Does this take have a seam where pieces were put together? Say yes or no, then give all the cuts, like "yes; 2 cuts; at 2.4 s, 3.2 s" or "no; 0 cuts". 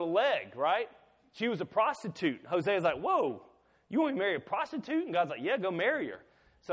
no; 0 cuts